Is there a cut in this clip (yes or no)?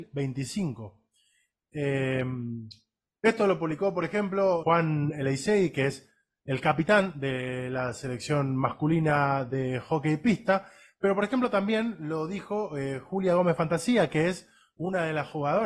yes